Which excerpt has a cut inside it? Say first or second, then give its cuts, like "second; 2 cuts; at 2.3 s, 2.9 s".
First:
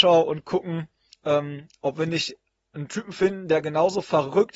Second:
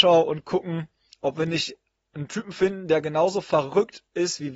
second; 1 cut; at 1.2 s